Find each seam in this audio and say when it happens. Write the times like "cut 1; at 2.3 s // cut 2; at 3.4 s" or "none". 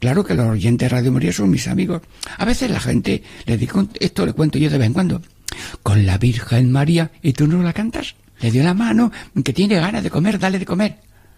cut 1; at 8.4 s